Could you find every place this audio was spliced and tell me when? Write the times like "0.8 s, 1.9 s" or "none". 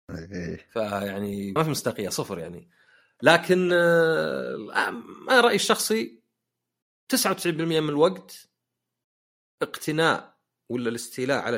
1.6 s